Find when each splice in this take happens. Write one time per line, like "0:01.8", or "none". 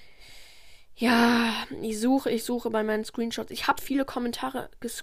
0:03.8